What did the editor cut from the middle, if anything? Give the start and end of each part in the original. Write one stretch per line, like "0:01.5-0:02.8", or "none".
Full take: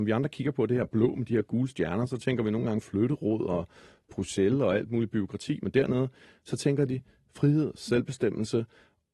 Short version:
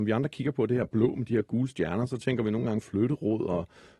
none